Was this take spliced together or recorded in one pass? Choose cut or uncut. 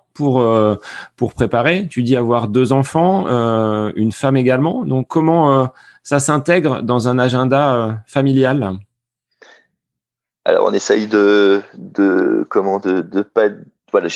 uncut